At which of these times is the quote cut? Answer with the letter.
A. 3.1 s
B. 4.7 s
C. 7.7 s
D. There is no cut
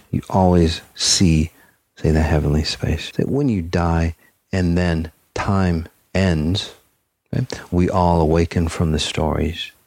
D